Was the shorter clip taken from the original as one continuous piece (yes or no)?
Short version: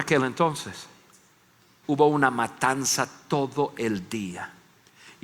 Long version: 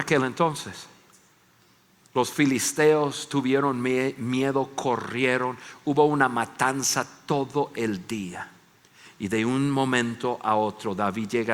no